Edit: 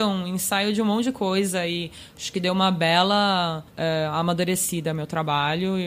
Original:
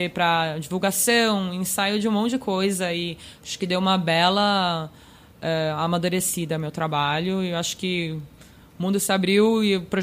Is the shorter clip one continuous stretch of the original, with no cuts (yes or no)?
no